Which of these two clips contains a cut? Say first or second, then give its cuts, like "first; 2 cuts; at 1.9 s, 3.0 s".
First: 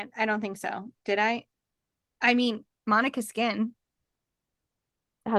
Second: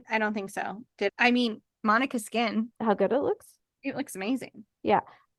second; 2 cuts; at 1.1 s, 2.7 s